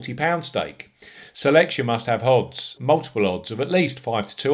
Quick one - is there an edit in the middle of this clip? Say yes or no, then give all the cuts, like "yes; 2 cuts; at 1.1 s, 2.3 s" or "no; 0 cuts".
yes; 1 cut; at 2.8 s